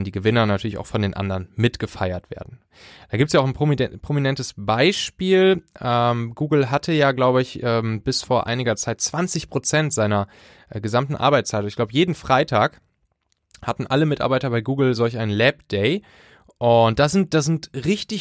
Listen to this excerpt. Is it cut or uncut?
uncut